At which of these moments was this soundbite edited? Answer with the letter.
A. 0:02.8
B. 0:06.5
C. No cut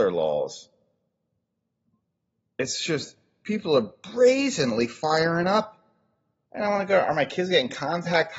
B